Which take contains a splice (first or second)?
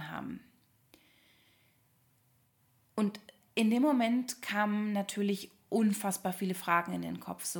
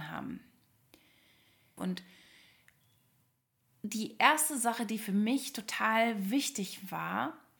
second